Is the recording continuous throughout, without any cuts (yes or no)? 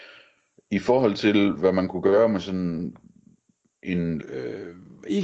no